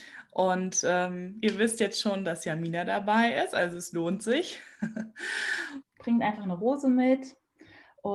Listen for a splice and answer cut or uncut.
cut